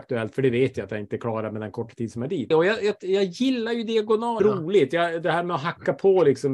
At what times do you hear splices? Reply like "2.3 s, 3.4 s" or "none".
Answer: 2.5 s, 4.4 s